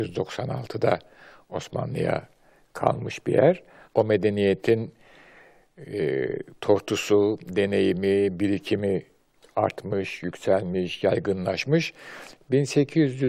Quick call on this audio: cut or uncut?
cut